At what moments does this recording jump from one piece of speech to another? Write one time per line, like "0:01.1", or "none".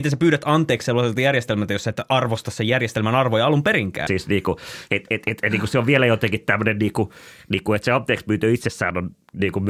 0:04.1